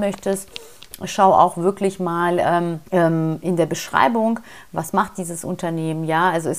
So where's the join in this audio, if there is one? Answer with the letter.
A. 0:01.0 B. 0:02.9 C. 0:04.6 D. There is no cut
B